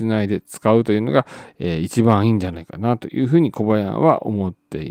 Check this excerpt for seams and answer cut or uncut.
uncut